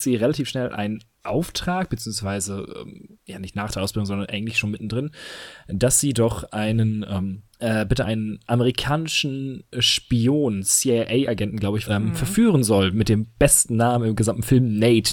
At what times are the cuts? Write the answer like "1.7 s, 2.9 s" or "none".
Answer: 7.5 s, 11.8 s